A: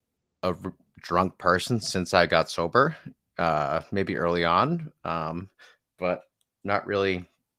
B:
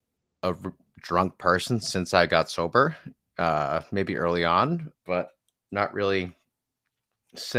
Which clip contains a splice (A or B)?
B